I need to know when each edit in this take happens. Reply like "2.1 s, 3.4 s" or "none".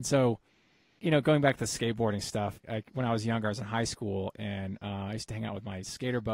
1.0 s, 2.6 s